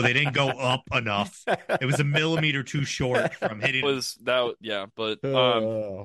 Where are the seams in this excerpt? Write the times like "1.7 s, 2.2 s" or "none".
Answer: 3.8 s